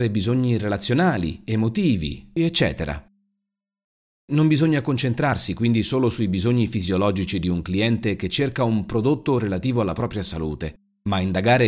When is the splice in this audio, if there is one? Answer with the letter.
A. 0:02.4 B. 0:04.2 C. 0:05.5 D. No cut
A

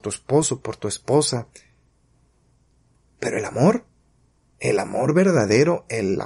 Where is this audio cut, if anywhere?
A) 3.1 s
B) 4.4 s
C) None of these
A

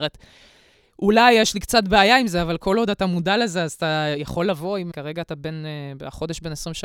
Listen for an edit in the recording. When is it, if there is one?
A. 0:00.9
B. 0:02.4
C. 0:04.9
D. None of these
C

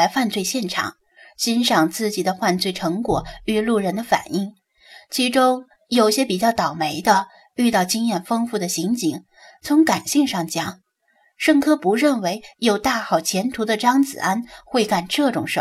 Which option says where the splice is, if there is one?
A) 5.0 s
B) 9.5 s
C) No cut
B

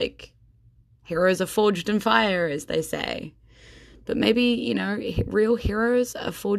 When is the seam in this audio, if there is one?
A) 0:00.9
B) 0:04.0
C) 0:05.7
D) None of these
D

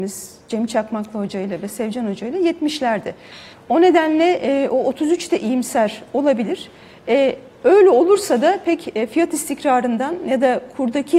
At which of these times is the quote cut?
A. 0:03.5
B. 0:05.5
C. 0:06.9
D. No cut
A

